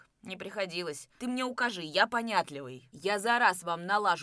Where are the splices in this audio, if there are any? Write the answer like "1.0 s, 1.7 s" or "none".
1.2 s